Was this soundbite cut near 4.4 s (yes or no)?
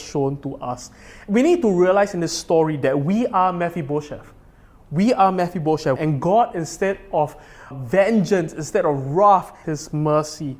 no